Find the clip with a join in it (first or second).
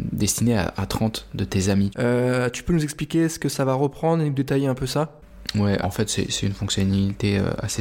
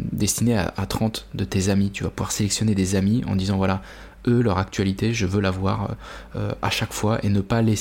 first